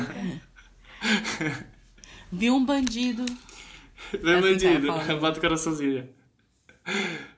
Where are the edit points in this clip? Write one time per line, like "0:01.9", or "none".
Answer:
none